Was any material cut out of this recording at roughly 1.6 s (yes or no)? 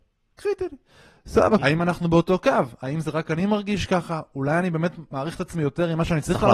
yes